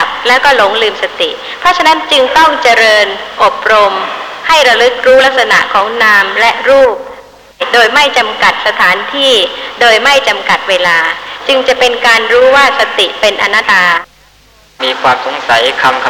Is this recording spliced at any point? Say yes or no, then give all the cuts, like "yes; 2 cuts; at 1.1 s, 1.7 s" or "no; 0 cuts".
yes; 1 cut; at 13.6 s